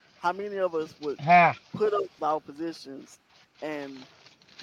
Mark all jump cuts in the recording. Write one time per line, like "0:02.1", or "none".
0:02.2